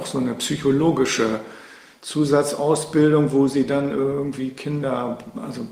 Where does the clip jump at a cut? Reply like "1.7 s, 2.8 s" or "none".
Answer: none